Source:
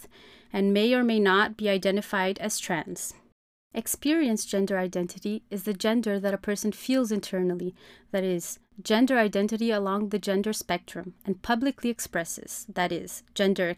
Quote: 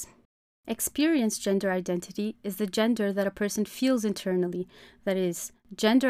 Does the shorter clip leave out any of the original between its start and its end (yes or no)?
no